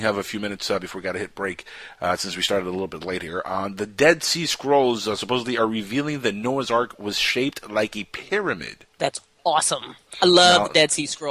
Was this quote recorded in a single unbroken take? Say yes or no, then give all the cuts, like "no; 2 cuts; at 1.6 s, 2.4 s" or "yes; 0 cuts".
yes; 0 cuts